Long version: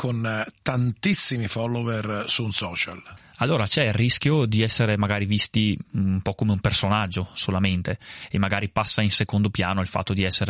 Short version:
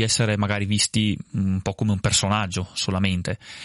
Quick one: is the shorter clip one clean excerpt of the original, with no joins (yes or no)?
yes